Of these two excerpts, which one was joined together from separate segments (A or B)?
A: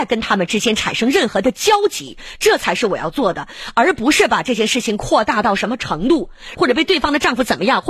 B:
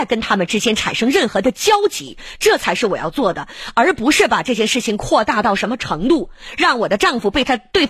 A